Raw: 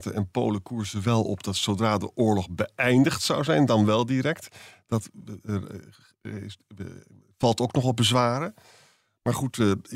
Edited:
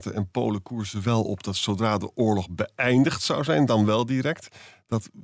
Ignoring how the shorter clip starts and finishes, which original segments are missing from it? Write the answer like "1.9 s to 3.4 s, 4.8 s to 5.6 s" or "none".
none

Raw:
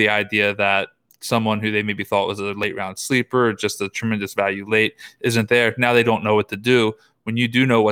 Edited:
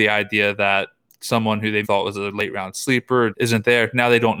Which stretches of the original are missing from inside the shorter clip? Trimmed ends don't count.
1.8 s to 2.1 s, 3.5 s to 5.2 s

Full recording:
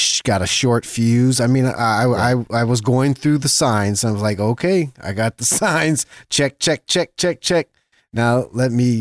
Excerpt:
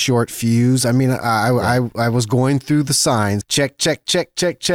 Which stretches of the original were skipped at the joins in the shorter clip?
4.0 s to 6.2 s

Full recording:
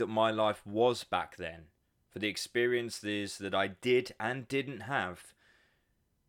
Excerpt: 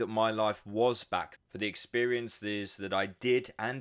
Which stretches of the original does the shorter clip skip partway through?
1.4 s to 2.0 s

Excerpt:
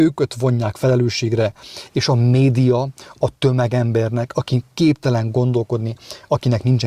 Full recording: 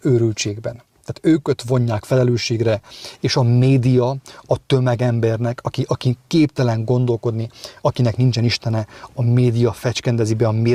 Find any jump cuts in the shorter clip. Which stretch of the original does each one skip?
5.6 s to 5.9 s

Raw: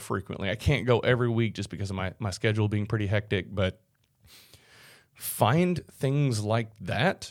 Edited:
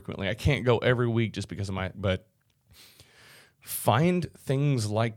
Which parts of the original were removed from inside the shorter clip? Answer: 2.2 s to 3.5 s

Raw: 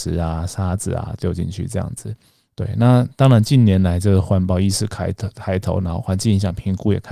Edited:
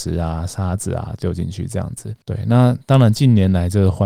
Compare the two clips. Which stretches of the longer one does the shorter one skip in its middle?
2.2 s to 2.5 s

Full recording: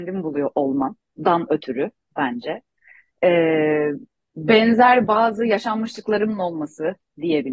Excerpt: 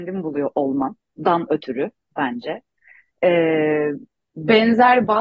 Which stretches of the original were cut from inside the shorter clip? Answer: none

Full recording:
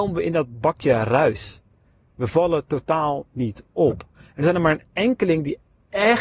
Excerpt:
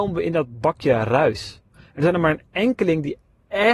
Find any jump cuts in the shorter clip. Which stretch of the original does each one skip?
1.7 s to 4.1 s

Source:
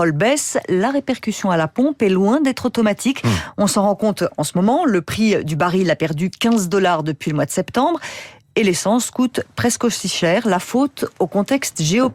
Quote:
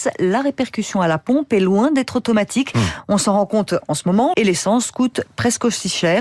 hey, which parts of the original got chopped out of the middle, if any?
4.8 s to 8.5 s

